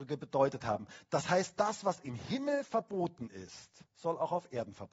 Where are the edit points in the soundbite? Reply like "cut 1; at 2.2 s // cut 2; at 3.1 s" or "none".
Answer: cut 1; at 3.9 s